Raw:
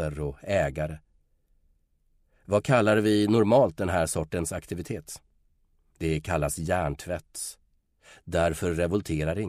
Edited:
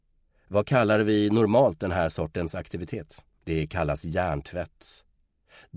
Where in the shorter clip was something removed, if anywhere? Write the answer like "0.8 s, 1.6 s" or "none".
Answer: 3.3 s